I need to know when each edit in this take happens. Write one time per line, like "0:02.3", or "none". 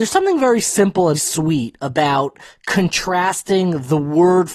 0:01.1